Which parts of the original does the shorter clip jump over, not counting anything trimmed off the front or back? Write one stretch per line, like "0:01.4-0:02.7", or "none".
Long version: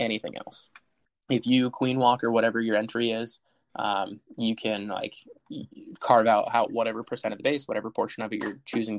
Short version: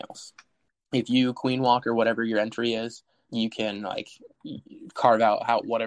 0:03.7-0:04.3